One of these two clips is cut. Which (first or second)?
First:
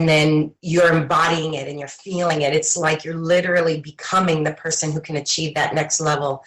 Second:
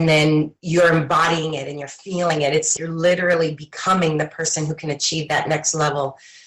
second